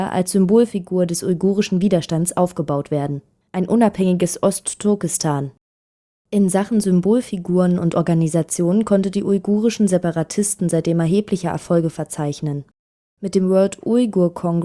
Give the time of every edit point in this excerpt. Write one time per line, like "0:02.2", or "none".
0:03.5